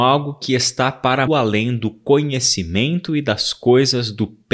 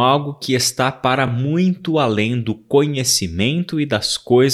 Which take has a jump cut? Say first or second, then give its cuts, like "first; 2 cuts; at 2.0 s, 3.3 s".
first; 1 cut; at 1.3 s